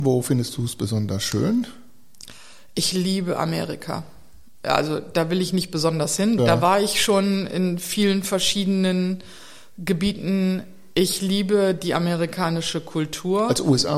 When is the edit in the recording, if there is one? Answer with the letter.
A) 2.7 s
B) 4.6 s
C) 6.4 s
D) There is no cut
C